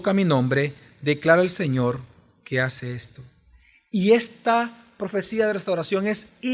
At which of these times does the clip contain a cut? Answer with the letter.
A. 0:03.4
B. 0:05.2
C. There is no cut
C